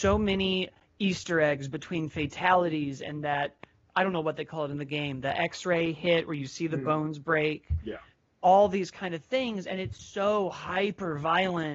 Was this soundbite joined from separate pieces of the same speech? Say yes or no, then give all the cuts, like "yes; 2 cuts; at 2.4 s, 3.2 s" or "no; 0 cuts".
no; 0 cuts